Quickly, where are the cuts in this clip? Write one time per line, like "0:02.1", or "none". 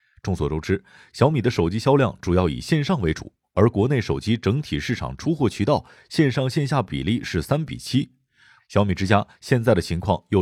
0:08.6